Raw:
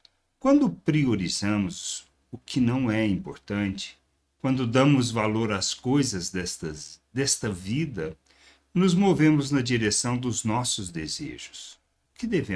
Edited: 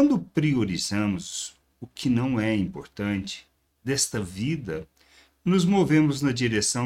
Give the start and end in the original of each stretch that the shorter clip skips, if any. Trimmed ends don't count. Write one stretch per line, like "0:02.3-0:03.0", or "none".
0:04.3-0:07.1